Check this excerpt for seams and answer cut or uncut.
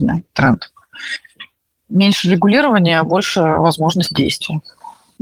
uncut